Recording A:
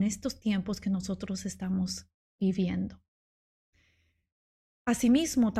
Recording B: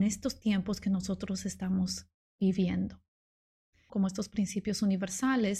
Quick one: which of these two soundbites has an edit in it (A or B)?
B